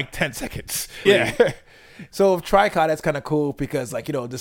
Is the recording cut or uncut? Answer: cut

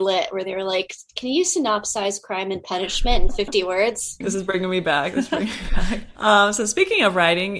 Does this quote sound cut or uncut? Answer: cut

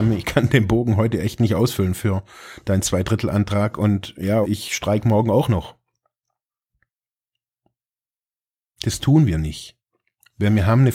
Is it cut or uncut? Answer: cut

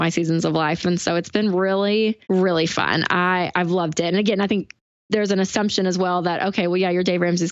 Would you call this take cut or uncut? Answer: cut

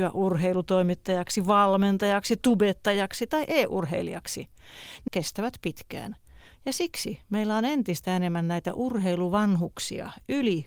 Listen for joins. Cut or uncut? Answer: cut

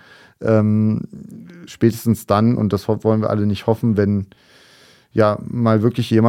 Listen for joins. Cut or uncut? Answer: uncut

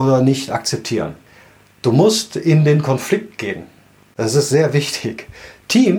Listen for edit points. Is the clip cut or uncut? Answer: uncut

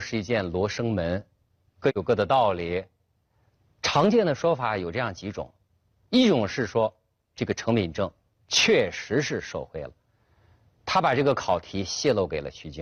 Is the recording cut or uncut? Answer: uncut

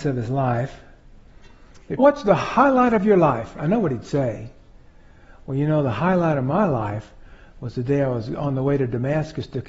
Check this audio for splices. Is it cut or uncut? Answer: cut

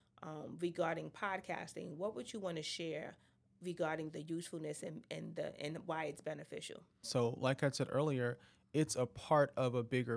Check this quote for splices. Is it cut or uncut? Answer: cut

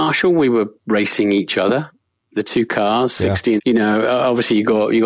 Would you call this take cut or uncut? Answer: cut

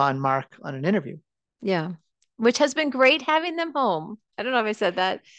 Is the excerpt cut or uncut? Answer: uncut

